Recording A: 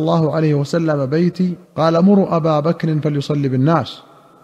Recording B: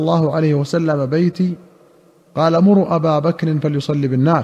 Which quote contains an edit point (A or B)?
A